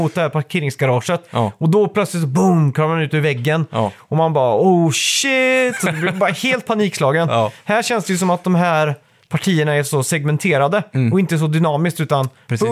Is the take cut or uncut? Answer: uncut